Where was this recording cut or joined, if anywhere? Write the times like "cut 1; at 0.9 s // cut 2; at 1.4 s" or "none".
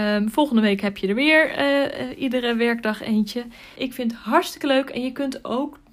cut 1; at 3.8 s